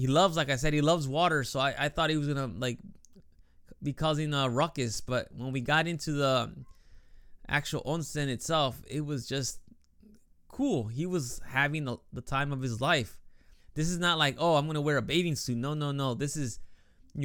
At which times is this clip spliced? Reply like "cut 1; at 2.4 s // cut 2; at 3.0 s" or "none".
cut 1; at 13.6 s